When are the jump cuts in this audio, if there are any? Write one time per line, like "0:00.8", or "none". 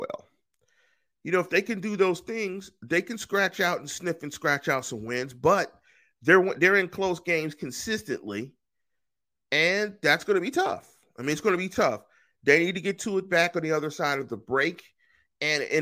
none